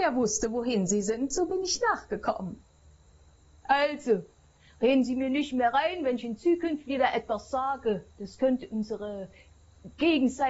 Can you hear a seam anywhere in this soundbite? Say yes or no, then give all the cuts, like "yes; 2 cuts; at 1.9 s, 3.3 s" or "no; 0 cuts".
yes; 2 cuts; at 3.6 s, 8.1 s